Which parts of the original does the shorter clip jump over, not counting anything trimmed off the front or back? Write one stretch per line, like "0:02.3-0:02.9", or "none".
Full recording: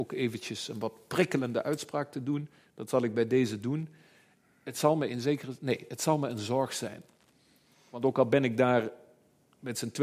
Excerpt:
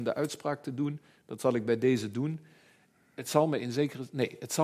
none